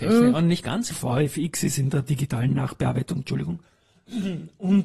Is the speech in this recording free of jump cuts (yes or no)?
no